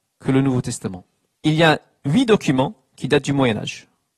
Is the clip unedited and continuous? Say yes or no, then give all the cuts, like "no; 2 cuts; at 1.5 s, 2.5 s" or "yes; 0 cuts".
no; 1 cut; at 1.3 s